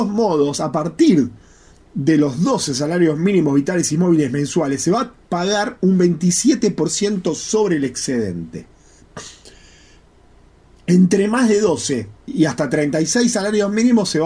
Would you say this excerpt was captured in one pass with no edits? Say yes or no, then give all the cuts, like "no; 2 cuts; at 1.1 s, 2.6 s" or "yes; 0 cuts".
no; 1 cut; at 12.2 s